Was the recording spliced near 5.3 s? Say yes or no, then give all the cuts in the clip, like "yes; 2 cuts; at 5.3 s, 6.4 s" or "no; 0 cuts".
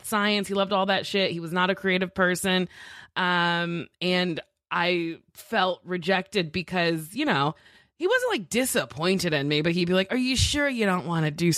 yes; 1 cut; at 5.3 s